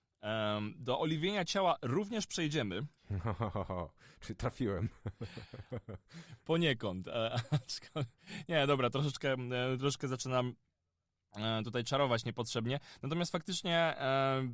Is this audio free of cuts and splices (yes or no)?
no